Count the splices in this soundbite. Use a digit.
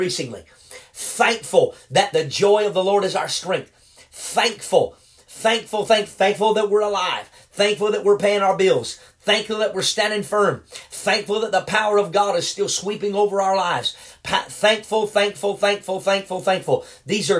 0